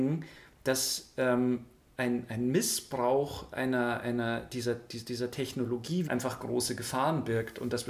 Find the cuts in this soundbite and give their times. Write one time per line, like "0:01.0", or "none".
0:06.0